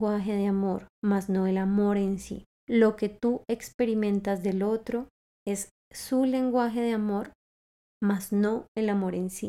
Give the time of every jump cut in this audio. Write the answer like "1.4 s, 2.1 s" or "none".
2.5 s